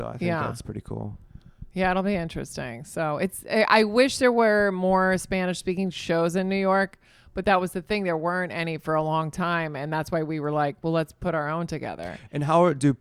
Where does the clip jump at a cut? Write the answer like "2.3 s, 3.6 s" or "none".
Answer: none